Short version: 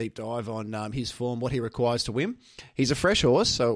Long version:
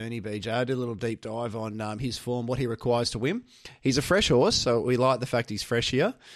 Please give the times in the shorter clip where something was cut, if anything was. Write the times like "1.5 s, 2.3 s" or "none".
none